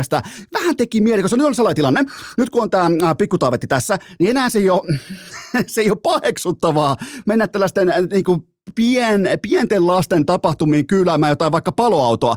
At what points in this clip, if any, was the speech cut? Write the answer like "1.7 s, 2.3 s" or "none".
none